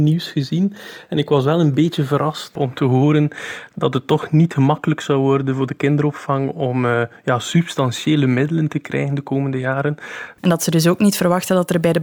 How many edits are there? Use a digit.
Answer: 2